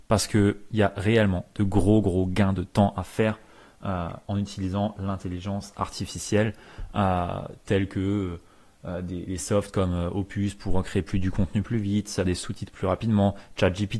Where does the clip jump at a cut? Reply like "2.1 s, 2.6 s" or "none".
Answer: 9.3 s, 12.2 s

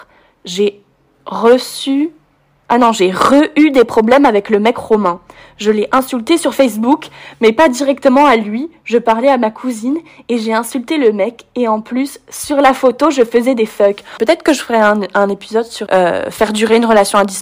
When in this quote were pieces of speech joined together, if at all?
14.2 s, 15.9 s

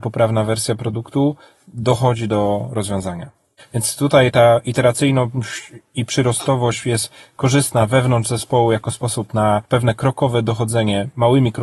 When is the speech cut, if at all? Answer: 3.6 s, 9.6 s

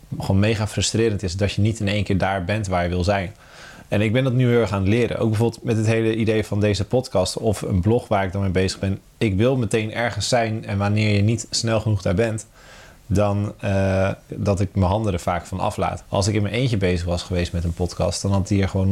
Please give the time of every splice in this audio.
14.3 s, 16.0 s

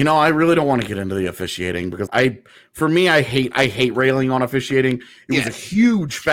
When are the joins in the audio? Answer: 2.1 s

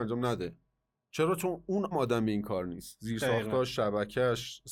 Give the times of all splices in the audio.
1.9 s

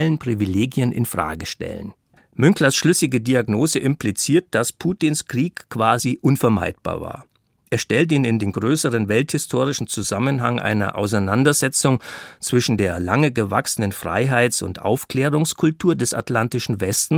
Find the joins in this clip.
none

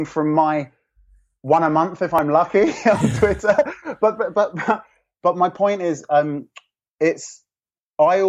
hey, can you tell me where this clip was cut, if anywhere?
none

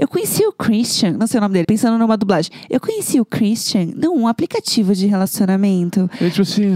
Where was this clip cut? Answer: 1.6 s

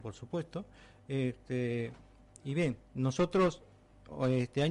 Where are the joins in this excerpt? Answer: none

